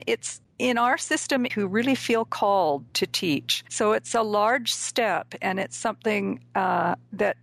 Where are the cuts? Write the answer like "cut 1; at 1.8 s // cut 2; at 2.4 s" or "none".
cut 1; at 1.5 s